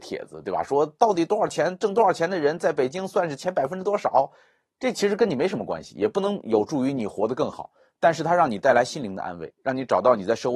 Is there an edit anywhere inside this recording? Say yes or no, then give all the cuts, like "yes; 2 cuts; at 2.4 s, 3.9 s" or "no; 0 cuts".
no; 0 cuts